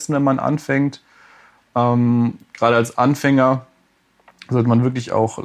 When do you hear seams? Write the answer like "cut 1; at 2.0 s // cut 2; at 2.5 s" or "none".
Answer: none